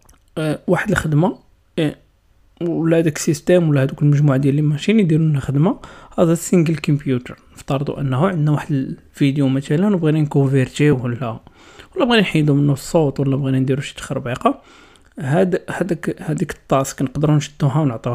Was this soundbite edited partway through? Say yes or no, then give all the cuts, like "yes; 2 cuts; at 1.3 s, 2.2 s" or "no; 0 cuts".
no; 0 cuts